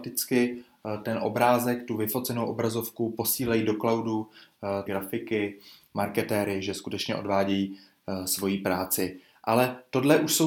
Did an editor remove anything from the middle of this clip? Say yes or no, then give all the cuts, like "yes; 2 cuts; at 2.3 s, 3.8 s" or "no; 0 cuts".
yes; 1 cut; at 4.9 s